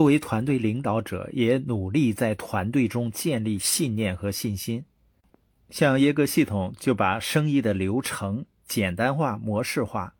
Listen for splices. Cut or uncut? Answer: uncut